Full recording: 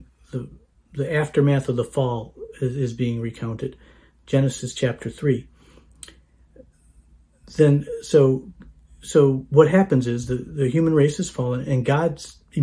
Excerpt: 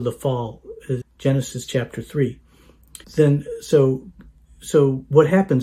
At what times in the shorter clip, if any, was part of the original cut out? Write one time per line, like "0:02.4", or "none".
0:01.0
0:03.0